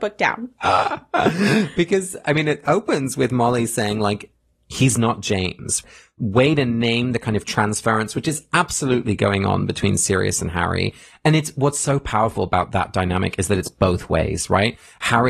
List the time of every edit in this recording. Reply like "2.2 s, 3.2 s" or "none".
none